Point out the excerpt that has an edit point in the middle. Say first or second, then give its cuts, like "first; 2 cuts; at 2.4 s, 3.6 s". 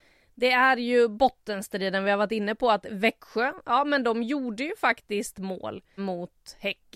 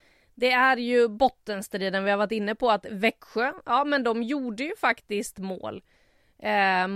first; 1 cut; at 6.0 s